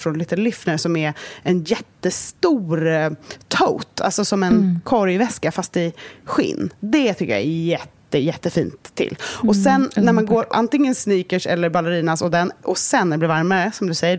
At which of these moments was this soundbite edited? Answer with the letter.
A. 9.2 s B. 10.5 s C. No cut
B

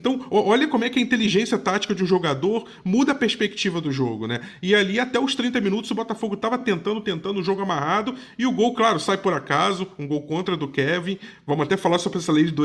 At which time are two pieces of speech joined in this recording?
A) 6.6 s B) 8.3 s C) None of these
C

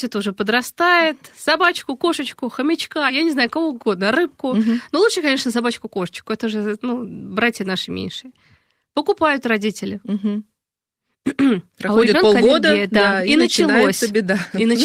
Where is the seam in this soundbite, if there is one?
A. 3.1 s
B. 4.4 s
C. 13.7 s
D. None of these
D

